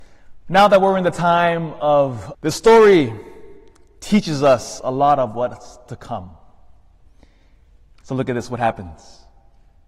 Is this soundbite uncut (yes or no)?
no